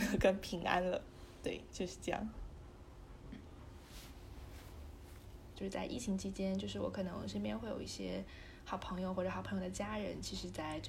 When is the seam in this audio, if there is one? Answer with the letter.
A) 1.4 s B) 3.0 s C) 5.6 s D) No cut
C